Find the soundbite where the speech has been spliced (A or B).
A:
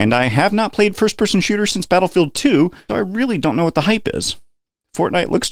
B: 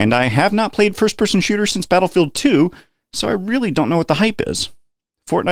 A